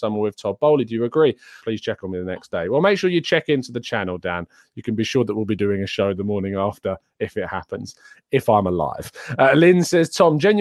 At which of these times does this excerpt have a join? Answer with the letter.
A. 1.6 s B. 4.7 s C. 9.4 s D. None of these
A